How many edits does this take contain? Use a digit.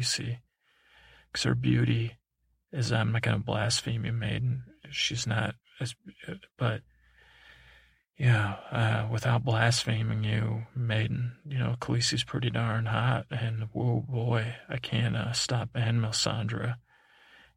0